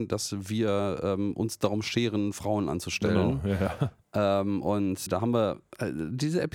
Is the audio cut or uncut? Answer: cut